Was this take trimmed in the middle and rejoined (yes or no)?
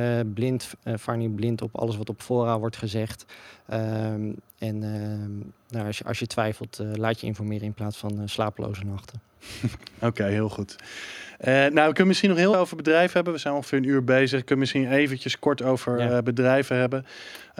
yes